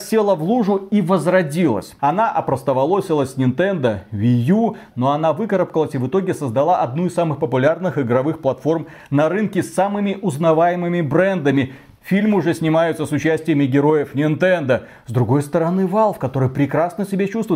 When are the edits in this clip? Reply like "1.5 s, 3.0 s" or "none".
2.0 s